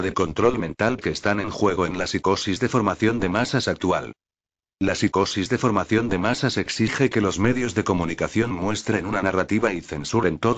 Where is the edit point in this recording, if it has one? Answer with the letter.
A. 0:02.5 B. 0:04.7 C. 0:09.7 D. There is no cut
B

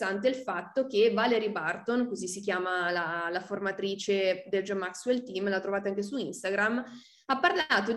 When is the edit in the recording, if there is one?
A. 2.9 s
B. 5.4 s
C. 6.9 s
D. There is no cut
D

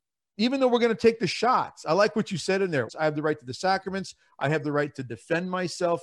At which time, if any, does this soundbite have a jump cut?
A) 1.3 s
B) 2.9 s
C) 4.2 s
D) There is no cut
B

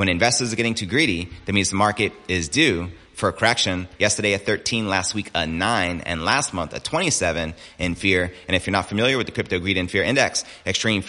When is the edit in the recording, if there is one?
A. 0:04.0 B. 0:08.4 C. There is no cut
A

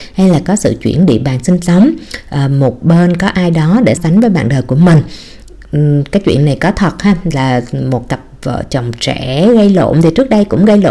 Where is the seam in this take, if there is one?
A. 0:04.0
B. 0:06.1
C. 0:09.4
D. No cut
A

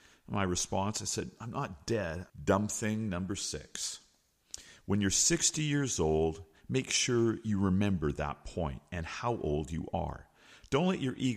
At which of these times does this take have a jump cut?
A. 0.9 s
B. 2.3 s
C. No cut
B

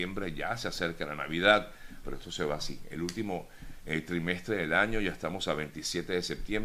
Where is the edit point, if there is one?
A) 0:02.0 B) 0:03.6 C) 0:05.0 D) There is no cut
A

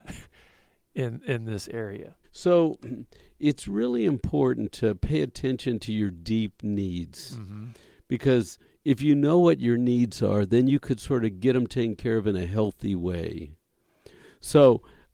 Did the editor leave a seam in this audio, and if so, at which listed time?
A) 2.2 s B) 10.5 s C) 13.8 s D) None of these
A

